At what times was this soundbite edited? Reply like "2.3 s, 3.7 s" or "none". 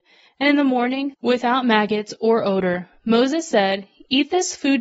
1.1 s

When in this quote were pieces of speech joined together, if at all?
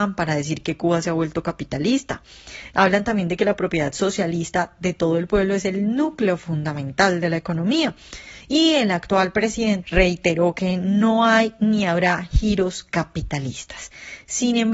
2.7 s, 9.8 s

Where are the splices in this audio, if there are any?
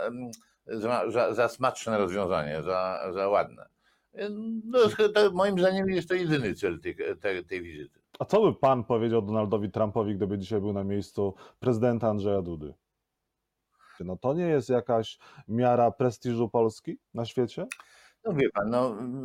8.1 s, 14.0 s, 17.0 s

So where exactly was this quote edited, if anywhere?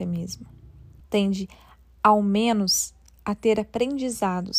1.0 s

